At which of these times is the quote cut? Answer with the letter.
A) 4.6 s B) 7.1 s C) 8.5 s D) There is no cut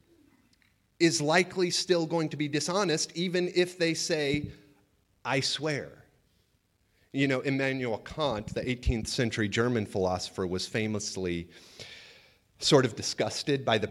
D